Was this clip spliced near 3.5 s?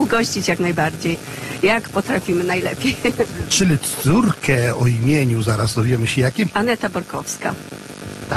no; 1 cut; at 6.5 s

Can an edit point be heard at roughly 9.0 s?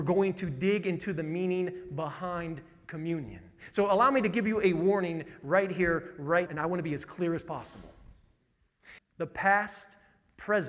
yes; 2 cuts; at 6.5 s, 9.0 s

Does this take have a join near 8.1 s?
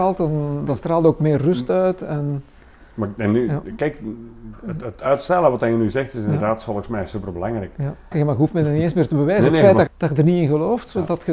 yes; 2 cuts; at 8.1 s, 9.9 s

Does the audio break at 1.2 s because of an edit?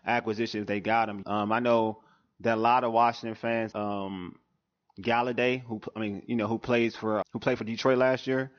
yes; 3 cuts; at 1.2 s, 3.7 s, 7.2 s

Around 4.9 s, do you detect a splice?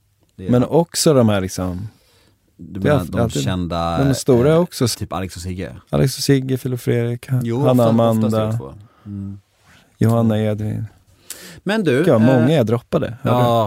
yes; 1 cut; at 4.9 s

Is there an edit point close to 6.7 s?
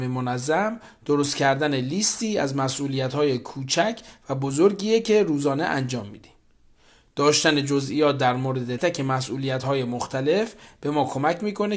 no; 1 cut; at 8.8 s

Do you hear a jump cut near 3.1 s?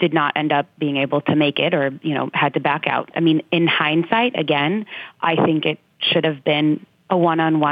yes; 1 cut; at 3.1 s

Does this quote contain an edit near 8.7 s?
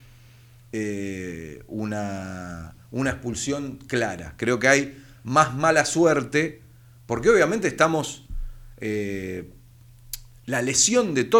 no; 0 cuts

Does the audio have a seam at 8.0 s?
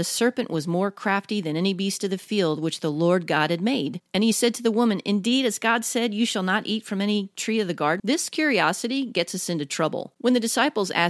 yes; 1 cut; at 8.0 s

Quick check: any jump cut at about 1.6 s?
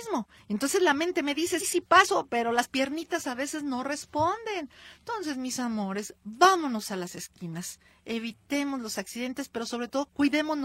yes; 1 cut; at 1.6 s

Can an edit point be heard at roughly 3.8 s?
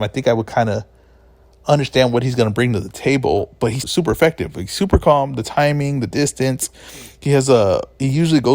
yes; 1 cut; at 3.8 s

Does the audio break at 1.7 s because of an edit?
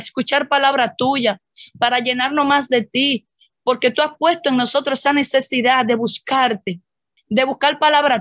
no; 1 cut; at 7.2 s

